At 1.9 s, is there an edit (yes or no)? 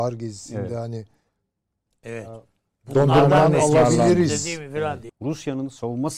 no